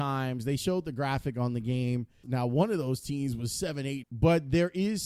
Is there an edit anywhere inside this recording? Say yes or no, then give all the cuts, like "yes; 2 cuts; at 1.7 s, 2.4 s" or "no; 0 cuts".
yes; 2 cuts; at 2.2 s, 4.0 s